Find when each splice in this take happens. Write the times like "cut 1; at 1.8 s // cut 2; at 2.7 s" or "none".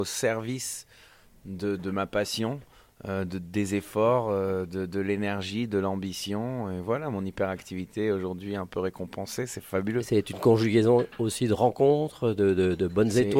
cut 1; at 1.8 s